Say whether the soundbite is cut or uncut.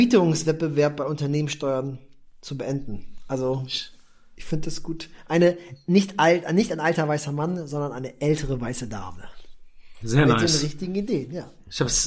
cut